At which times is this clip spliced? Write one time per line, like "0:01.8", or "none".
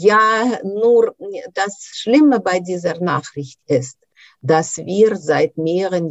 none